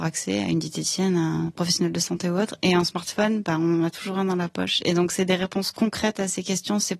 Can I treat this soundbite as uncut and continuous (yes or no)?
yes